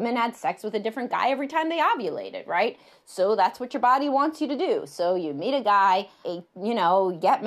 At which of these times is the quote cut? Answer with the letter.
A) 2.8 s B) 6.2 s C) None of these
B